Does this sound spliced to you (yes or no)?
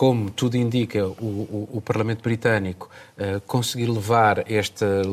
no